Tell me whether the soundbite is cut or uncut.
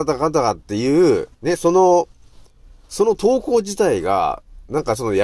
cut